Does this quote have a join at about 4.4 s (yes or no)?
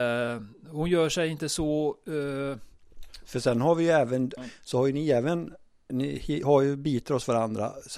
yes